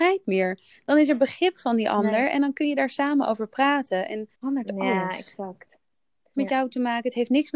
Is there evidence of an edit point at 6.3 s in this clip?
yes; 2 cuts; at 4.3 s, 6.3 s

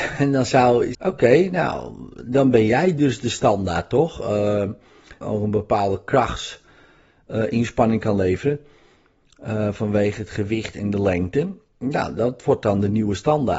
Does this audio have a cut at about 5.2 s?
yes; 2 cuts; at 0.9 s, 5.2 s

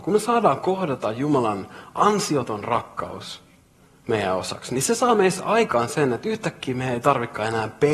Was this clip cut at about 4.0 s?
no; 0 cuts

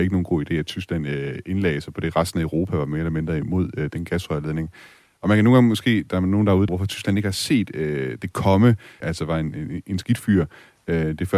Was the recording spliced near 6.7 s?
yes; 2 cuts; at 6.7 s, 9.0 s

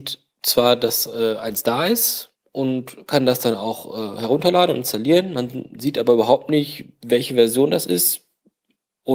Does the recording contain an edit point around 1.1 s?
no; 0 cuts

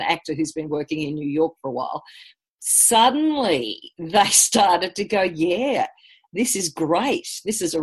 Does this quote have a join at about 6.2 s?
no; 0 cuts

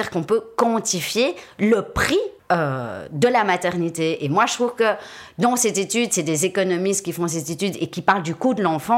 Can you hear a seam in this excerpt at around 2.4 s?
yes; 1 cut; at 2.4 s

